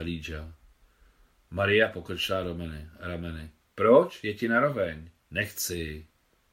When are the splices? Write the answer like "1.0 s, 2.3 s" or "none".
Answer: 5.2 s